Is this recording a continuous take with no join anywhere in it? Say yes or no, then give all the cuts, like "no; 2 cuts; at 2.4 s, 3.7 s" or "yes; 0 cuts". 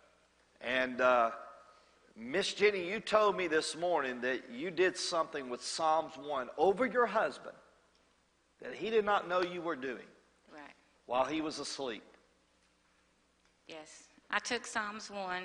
no; 1 cut; at 14.2 s